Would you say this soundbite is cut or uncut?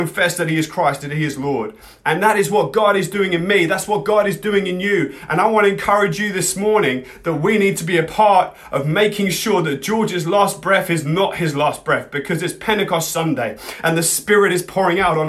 uncut